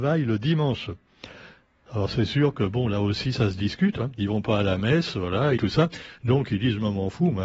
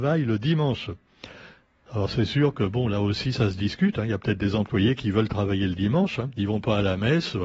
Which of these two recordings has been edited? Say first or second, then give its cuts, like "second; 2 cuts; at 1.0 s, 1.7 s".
first; 2 cuts; at 4.0 s, 5.6 s